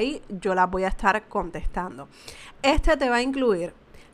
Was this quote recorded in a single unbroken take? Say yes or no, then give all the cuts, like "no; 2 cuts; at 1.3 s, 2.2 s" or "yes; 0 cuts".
no; 1 cut; at 2.5 s